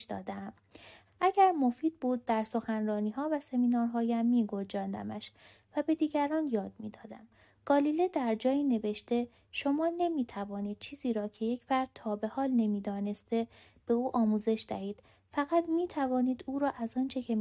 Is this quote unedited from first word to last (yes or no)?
no